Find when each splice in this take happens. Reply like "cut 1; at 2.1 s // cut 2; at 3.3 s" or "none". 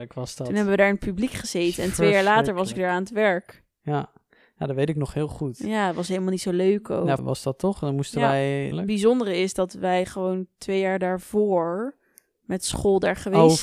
cut 1; at 7.2 s // cut 2; at 8.7 s